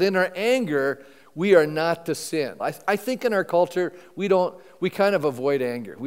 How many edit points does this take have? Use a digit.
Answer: 1